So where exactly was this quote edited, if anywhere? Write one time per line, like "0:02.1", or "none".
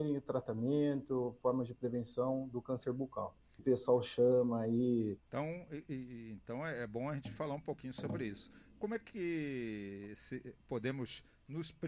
0:03.6
0:05.2